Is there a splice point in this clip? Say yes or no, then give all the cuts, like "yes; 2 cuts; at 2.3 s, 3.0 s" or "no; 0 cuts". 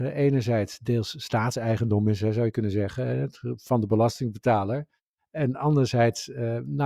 no; 0 cuts